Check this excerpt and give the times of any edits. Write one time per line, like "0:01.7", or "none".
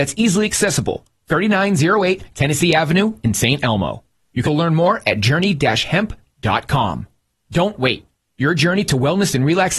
0:04.4